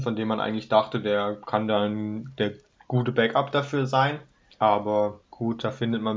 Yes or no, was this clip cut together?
yes